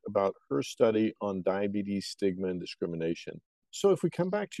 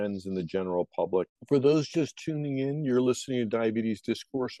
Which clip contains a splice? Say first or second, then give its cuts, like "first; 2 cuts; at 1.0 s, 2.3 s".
second; 1 cut; at 1.3 s